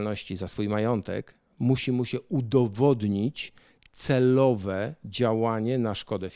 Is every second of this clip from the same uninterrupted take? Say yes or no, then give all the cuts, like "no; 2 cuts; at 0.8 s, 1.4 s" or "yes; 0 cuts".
yes; 0 cuts